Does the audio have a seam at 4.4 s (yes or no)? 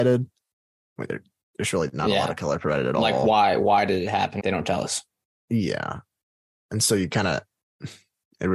yes